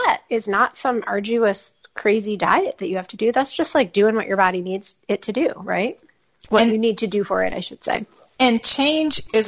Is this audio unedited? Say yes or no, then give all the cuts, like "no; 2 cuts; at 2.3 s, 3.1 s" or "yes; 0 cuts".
yes; 0 cuts